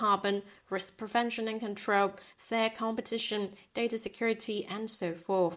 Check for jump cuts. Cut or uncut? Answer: uncut